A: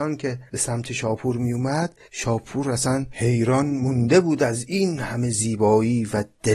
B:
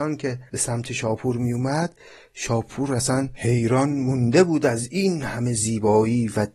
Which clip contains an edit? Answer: A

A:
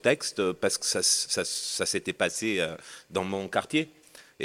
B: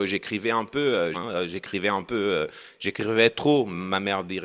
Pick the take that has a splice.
B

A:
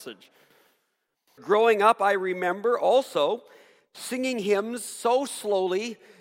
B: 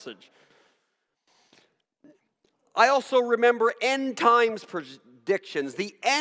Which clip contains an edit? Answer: A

